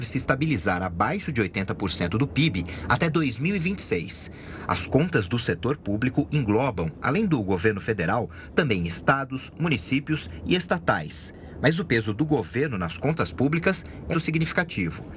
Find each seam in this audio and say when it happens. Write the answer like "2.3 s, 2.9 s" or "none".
14.1 s